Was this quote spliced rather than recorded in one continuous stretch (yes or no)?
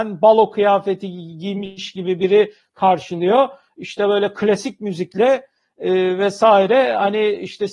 no